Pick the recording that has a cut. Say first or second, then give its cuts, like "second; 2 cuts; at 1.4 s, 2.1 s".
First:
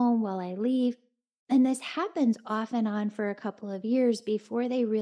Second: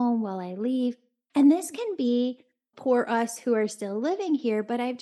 second; 2 cuts; at 1.3 s, 2.7 s